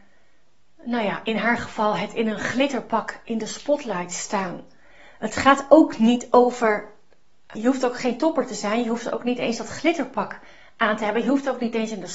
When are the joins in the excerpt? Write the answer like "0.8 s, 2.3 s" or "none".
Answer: 7.5 s